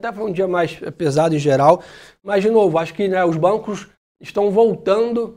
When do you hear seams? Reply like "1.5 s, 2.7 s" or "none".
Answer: none